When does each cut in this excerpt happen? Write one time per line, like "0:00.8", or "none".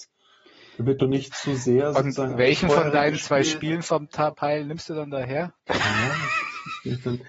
0:05.6

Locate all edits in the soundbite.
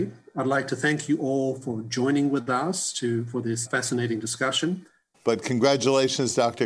0:03.7
0:05.1

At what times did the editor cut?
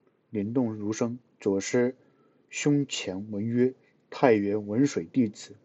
none

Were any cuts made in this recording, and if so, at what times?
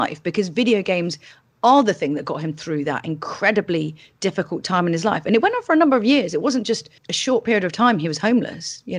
0:07.0

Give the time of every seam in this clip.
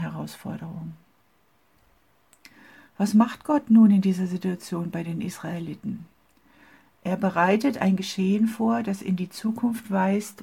none

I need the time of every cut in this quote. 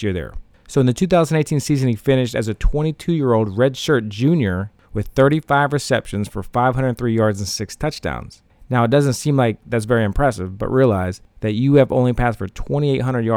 none

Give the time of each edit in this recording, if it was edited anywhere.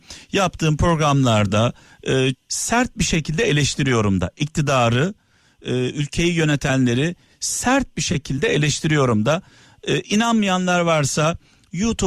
0:02.3

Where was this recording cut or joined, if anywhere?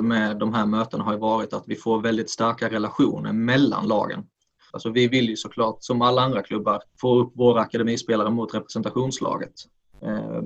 0:04.7
0:06.9

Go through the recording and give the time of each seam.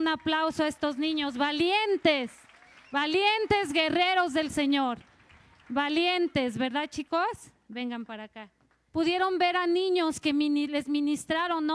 0:08.9

